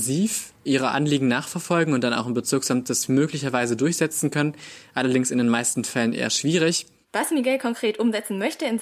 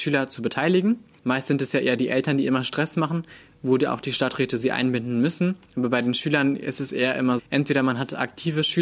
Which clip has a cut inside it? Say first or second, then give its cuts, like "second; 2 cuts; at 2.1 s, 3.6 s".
second; 1 cut; at 7.4 s